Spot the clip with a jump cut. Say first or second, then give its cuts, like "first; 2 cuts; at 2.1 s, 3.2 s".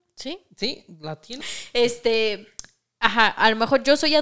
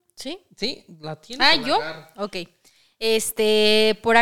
first; 1 cut; at 1.4 s